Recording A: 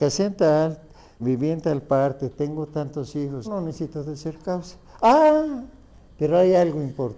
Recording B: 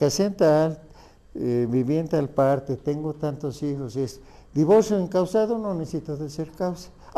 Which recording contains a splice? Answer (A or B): A